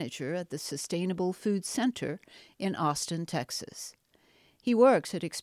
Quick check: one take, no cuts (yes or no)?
yes